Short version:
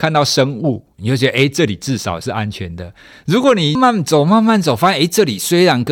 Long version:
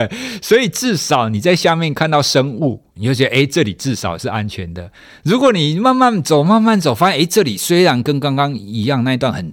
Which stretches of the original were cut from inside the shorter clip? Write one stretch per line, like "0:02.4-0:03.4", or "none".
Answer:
0:05.7-0:05.9